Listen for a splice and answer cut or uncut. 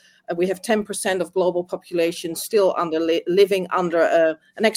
uncut